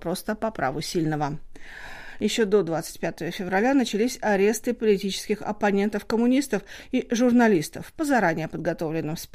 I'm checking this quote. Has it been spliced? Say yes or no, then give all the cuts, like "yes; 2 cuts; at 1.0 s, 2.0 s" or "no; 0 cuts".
no; 0 cuts